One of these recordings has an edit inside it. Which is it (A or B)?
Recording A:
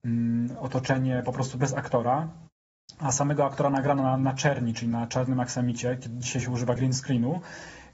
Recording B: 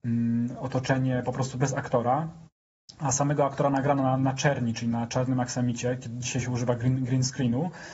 A